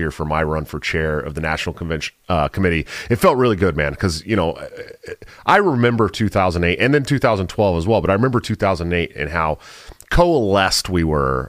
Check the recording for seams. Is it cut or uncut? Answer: uncut